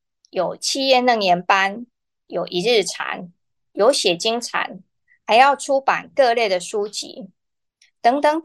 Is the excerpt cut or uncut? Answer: uncut